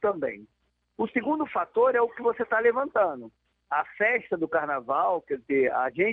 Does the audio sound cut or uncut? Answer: uncut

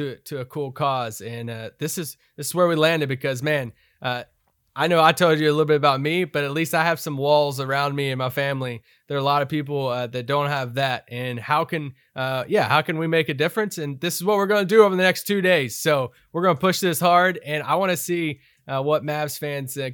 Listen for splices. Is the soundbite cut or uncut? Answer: uncut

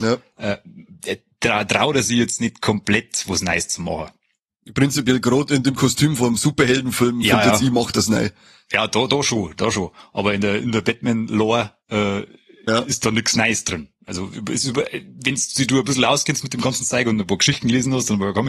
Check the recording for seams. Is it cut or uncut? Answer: uncut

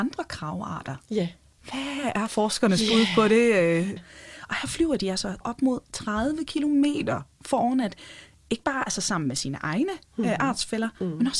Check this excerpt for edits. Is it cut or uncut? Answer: cut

